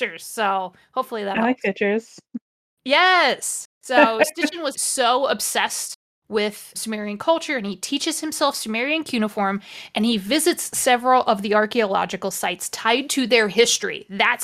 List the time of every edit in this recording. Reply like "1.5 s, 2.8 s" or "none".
4.7 s, 6.7 s